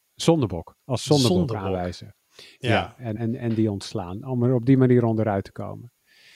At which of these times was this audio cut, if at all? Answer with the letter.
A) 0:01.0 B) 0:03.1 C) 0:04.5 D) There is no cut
B